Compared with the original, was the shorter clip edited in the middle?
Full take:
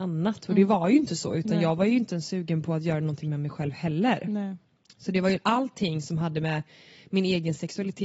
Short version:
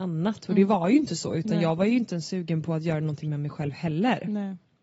no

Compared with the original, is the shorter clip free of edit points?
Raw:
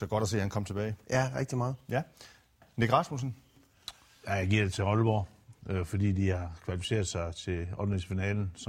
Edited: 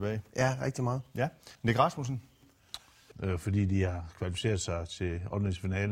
no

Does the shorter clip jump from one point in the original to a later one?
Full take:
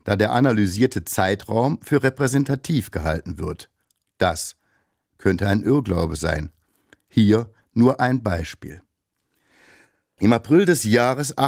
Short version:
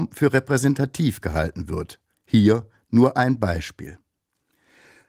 yes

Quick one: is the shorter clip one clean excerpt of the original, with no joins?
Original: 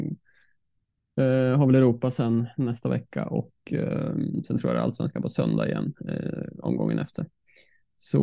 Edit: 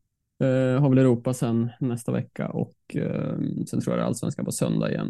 yes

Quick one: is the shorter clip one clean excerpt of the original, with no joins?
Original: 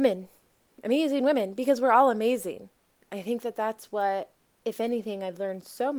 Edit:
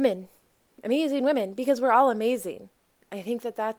yes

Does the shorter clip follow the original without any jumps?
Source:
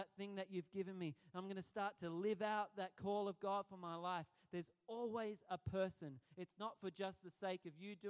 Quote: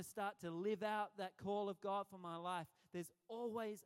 yes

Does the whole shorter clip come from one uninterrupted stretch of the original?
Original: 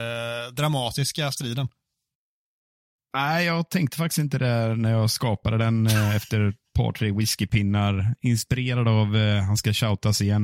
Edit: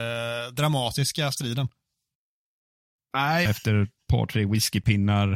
no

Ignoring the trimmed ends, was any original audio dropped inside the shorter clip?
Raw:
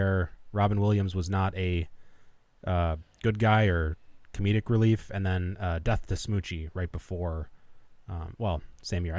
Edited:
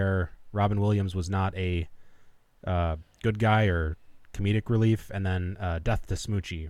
no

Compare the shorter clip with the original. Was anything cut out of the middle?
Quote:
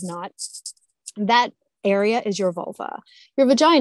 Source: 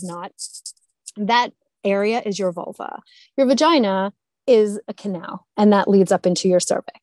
no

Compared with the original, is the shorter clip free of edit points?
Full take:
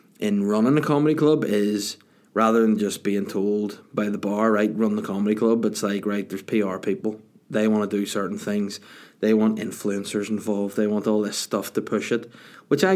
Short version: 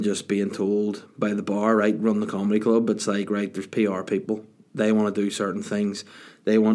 yes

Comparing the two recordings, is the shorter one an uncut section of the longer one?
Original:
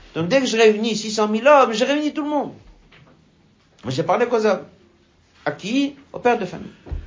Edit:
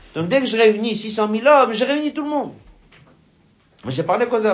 yes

